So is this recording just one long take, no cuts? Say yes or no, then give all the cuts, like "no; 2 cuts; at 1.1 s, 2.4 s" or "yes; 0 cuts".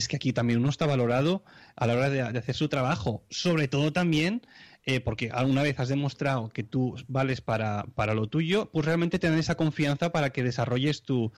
yes; 0 cuts